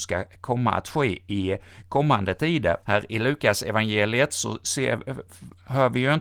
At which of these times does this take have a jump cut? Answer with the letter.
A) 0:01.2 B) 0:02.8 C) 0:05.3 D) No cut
B